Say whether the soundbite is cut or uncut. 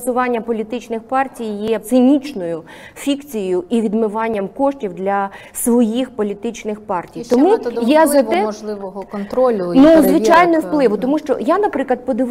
cut